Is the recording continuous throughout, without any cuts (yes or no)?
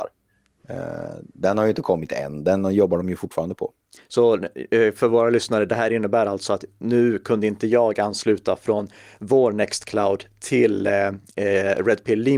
yes